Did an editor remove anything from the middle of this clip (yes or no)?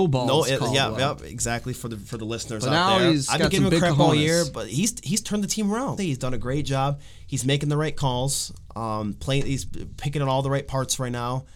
yes